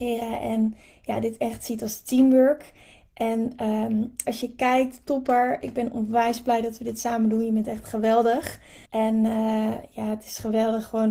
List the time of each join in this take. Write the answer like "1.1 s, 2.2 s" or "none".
4.2 s, 8.9 s